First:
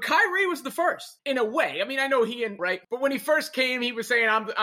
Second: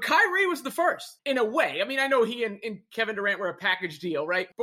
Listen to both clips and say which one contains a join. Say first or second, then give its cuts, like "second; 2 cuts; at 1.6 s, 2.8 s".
first; 1 cut; at 2.6 s